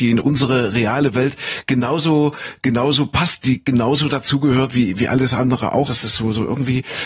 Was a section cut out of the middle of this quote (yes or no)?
yes